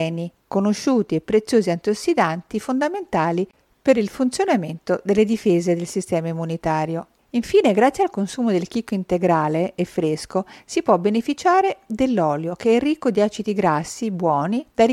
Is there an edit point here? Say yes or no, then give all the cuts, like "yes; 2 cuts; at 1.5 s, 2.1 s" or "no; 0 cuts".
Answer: no; 0 cuts